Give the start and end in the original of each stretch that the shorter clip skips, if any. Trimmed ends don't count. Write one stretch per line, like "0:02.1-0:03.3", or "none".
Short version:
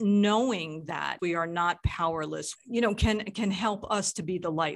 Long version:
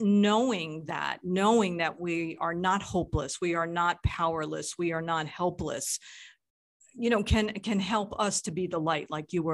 0:01.2-0:03.4
0:04.8-0:06.8